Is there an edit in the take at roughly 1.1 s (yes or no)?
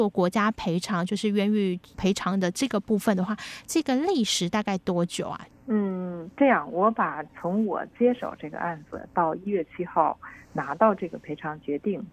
no